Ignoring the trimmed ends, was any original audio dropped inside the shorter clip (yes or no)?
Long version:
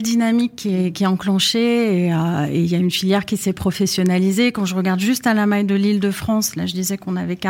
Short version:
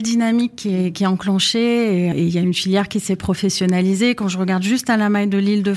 yes